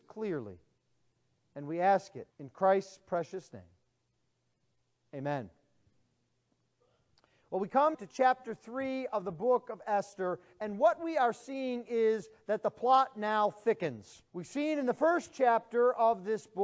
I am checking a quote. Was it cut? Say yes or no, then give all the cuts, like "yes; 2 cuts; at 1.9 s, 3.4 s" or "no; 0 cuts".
yes; 3 cuts; at 2.3 s, 7.9 s, 14.3 s